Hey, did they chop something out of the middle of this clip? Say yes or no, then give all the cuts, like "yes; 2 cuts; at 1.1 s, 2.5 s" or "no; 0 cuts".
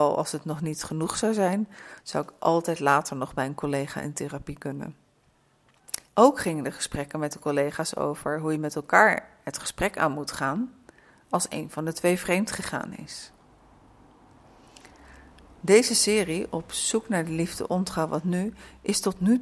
yes; 1 cut; at 6.1 s